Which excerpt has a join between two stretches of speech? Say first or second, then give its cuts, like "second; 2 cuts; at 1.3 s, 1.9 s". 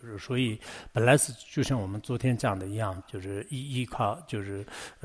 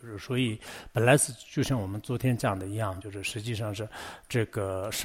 first; 1 cut; at 3.0 s